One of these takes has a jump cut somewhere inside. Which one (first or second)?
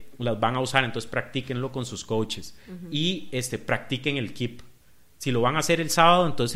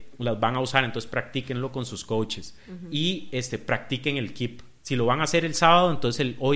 second